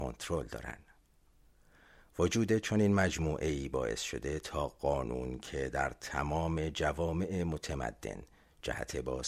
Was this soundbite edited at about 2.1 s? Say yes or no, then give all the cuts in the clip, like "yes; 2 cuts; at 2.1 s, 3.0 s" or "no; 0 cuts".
no; 0 cuts